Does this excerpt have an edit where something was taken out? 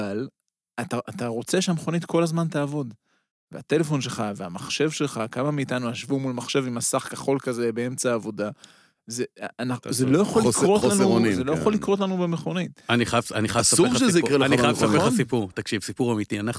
no; 0 cuts

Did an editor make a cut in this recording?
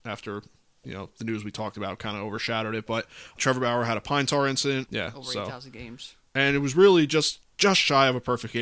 yes; 3 cuts; at 3.4 s, 4.9 s, 7.4 s

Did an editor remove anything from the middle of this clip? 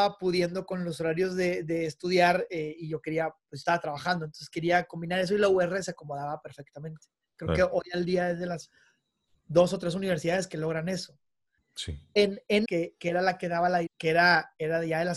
yes; 3 cuts; at 11.6 s, 12.7 s, 13.9 s

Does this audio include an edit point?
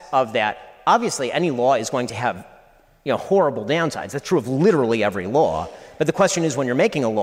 no; 0 cuts

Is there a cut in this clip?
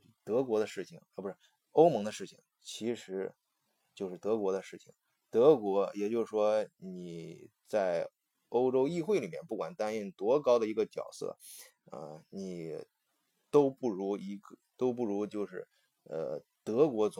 no; 0 cuts

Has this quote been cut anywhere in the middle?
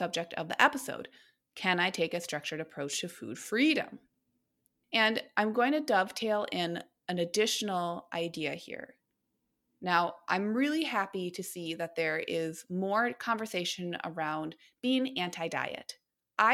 no; 0 cuts

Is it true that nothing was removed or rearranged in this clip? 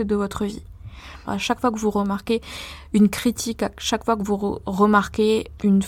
no; 1 cut; at 1.3 s

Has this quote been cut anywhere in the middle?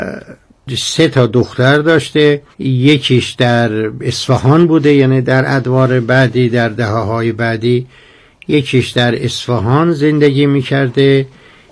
yes; 1 cut; at 2.5 s

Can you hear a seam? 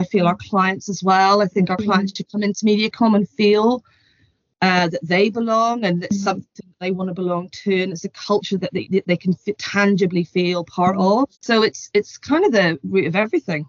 yes; 1 cut; at 11.3 s

